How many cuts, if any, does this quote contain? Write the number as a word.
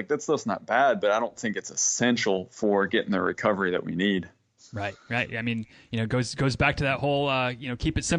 zero